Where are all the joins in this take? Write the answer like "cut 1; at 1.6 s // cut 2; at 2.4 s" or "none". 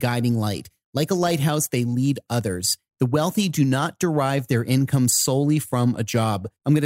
cut 1; at 2.9 s